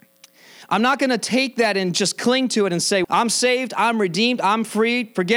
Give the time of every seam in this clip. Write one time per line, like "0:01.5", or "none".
0:03.0